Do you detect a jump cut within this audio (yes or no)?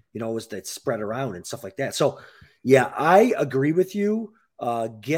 no